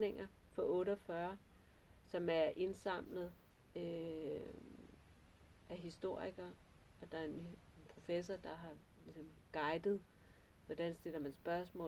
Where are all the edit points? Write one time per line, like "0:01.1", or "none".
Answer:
none